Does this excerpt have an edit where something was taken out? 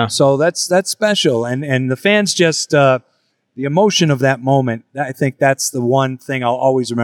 no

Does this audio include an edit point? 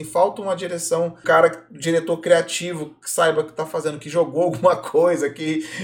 yes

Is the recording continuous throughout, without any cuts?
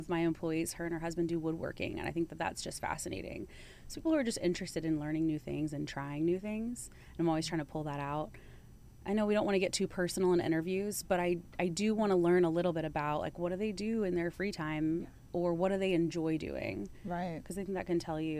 yes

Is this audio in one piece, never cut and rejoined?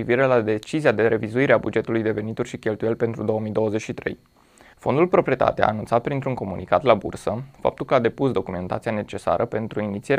no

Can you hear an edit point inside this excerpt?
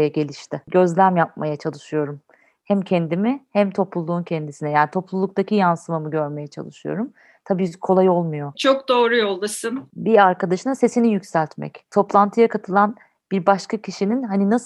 yes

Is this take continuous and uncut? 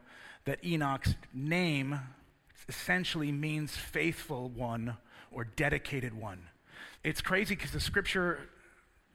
no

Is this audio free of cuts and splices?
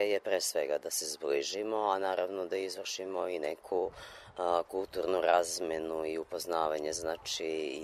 yes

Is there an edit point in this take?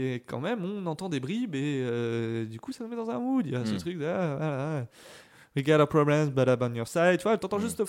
no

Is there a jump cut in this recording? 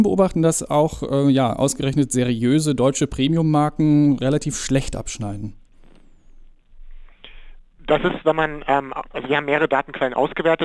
no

